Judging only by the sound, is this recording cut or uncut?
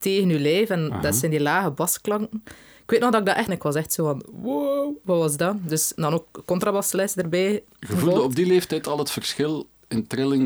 cut